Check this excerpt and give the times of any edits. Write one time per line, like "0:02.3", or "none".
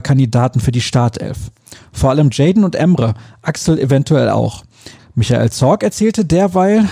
0:05.0